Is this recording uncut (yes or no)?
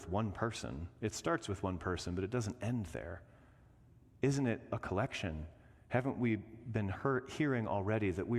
yes